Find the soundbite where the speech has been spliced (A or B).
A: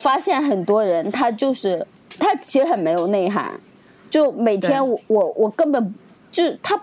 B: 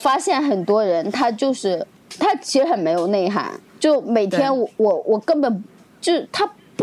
B